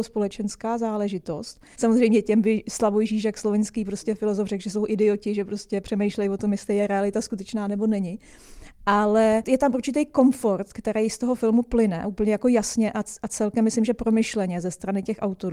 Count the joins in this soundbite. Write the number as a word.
one